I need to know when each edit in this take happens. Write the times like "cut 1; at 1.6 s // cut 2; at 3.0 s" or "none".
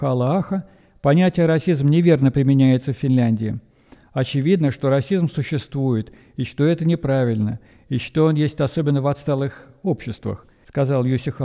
none